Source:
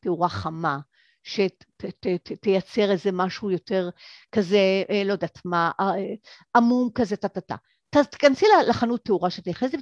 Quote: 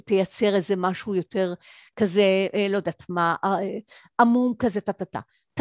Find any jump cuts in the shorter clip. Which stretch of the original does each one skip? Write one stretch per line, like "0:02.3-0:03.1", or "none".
none